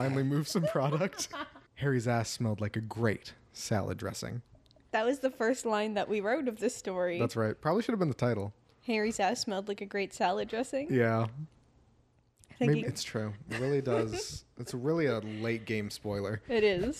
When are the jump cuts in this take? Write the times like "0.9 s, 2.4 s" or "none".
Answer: 1.7 s, 12.8 s

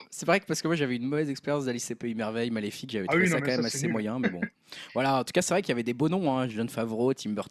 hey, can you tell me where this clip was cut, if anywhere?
none

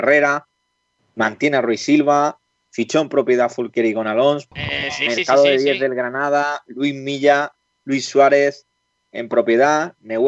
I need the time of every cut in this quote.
4.5 s

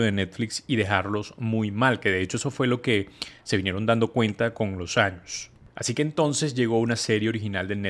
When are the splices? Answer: none

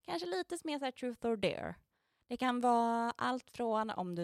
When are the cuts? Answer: none

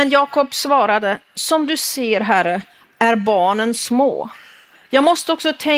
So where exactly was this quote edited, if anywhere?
none

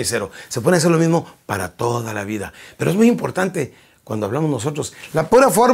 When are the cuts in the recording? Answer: none

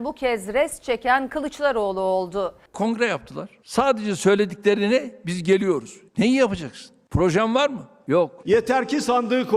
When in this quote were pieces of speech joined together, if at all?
2.7 s, 6.1 s

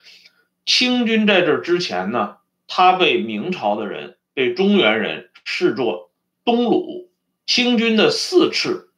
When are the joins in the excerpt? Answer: 7.4 s

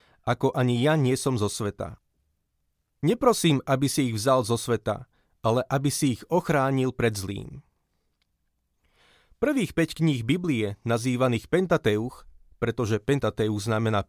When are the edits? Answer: none

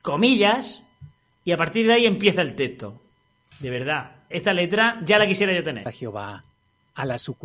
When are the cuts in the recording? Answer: 4.3 s, 5.8 s

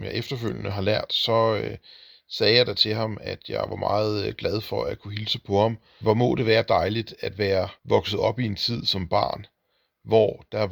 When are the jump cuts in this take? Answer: 6.0 s, 7.8 s

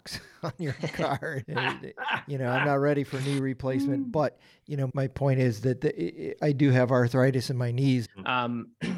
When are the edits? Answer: 1.4 s, 4.9 s, 8.0 s

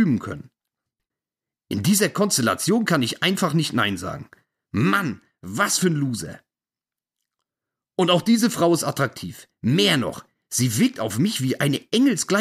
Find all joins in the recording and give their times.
none

